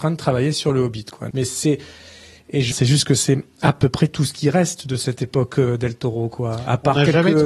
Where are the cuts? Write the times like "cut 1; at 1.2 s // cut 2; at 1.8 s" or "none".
cut 1; at 1.3 s // cut 2; at 2.7 s